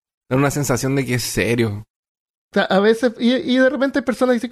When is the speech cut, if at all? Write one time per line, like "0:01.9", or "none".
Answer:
none

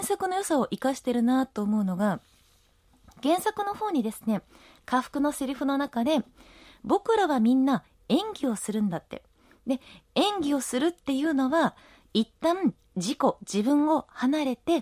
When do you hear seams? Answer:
none

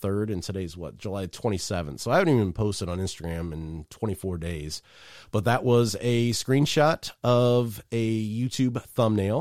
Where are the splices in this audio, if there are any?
none

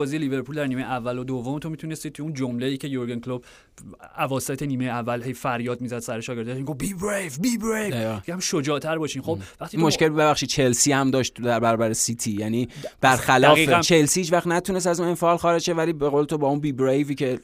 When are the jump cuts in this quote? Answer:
0:13.8

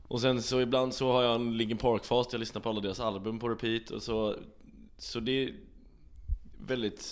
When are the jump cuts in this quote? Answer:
none

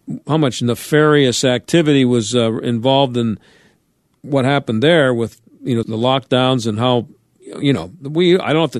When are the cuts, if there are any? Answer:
0:05.8

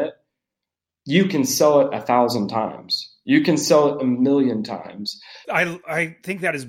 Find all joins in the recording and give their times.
0:05.4

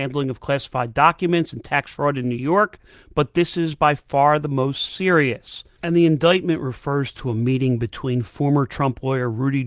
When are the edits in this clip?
0:05.8

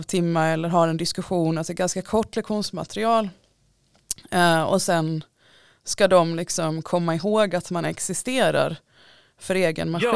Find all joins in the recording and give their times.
none

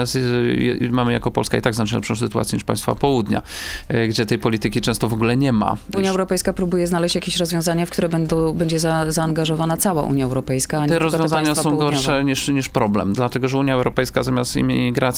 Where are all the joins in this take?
0:05.9

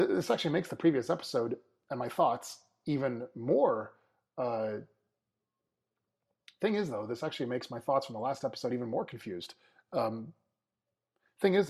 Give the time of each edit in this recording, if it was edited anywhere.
none

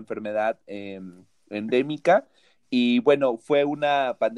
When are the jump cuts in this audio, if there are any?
0:02.6

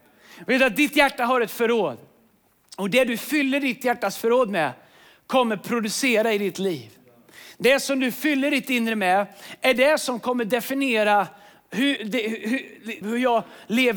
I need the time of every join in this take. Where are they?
0:12.0
0:13.0

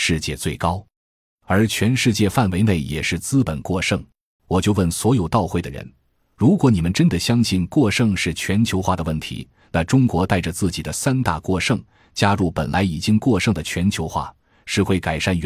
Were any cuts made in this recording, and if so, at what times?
0:04.4

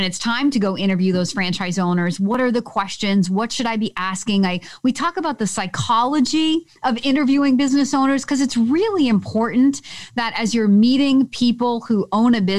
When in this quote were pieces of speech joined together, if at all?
none

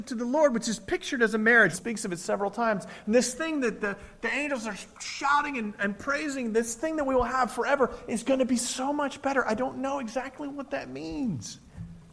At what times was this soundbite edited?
0:01.7

